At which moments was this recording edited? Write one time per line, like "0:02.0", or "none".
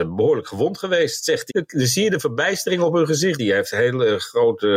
0:01.5
0:03.4